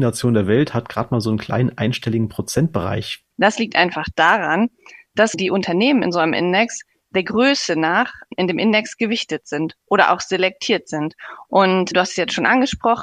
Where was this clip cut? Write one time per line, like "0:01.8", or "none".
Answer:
0:03.3
0:11.4